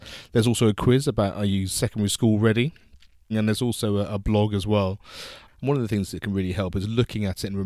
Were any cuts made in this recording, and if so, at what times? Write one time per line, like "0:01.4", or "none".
0:03.3